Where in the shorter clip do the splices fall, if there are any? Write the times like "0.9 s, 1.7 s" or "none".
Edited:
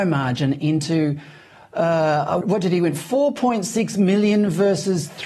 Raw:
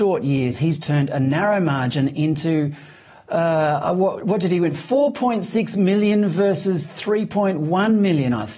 2.4 s